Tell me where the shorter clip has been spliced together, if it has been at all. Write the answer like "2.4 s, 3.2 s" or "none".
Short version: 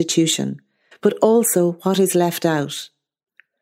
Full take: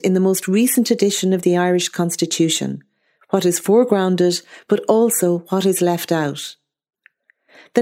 0.9 s